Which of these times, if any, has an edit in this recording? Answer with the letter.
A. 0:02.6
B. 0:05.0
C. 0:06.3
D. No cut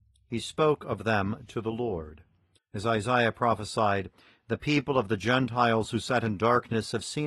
A